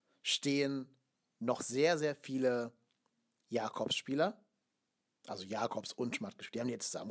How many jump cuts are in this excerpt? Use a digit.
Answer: 0